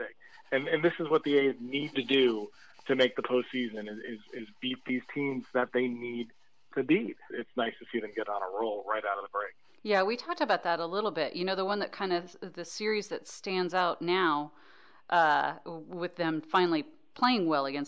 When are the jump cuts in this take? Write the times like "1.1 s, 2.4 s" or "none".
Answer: 7.3 s